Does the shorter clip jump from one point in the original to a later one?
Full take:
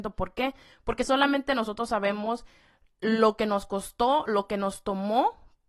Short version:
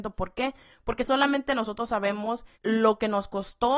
yes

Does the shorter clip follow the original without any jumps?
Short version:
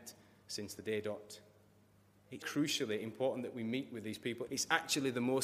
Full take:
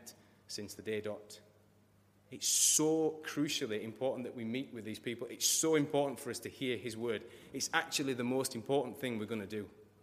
no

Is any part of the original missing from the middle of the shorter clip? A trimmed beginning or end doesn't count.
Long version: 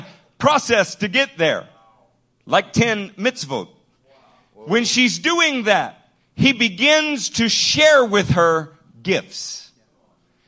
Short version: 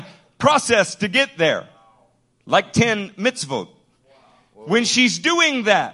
no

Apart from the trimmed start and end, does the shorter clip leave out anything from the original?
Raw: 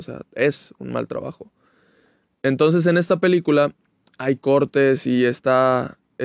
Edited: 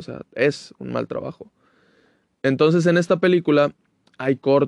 no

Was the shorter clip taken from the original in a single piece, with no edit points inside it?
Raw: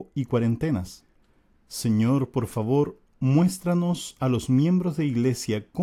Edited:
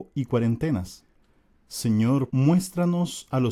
no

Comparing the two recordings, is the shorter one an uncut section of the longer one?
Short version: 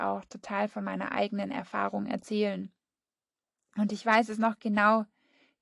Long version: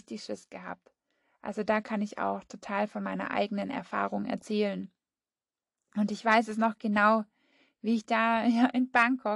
yes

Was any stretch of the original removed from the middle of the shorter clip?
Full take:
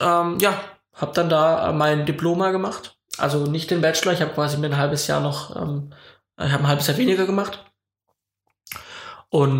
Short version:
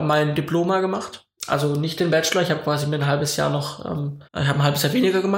yes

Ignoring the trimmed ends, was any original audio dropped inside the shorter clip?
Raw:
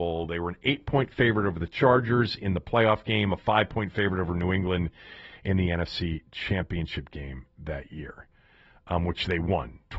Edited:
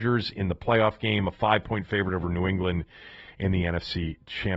no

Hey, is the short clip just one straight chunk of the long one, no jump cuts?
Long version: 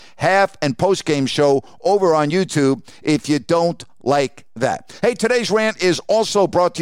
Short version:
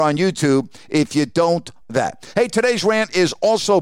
no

